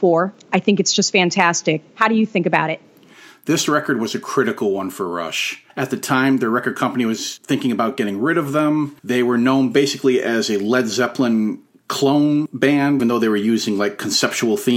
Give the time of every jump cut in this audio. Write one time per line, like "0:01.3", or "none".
0:05.7
0:09.0
0:13.0

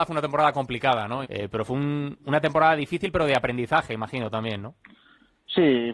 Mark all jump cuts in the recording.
0:01.2

